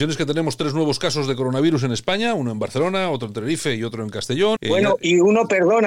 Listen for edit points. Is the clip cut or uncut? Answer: cut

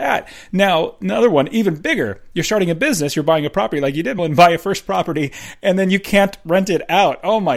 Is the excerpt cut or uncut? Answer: cut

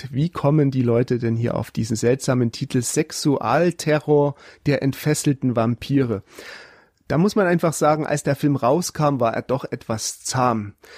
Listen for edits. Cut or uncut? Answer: uncut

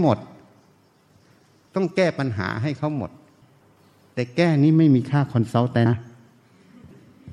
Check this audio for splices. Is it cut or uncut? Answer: cut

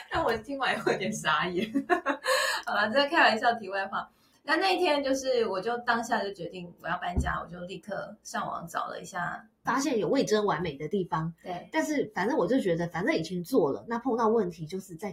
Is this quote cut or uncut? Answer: cut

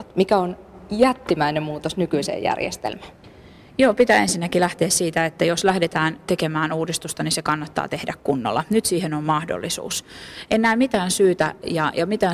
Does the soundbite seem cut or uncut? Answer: uncut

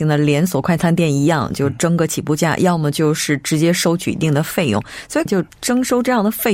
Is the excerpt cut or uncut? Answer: cut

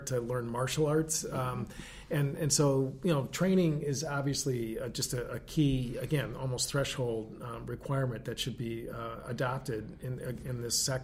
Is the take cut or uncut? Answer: uncut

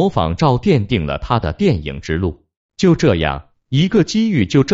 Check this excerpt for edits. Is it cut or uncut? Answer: cut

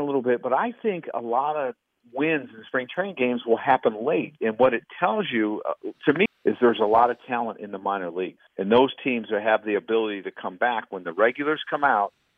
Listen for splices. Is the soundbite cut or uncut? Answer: cut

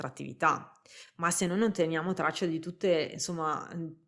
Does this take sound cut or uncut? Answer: uncut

